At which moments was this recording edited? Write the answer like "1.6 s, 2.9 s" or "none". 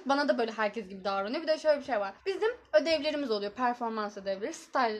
2.2 s